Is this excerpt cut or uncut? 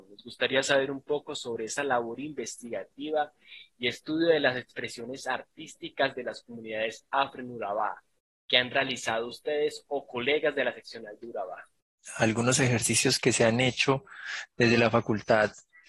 uncut